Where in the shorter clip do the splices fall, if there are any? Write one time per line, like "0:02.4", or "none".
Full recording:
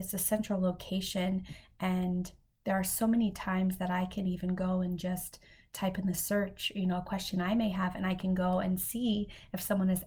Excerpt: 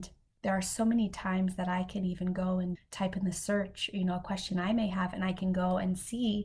0:02.7